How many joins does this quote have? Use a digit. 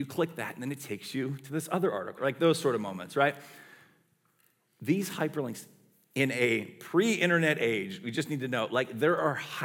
1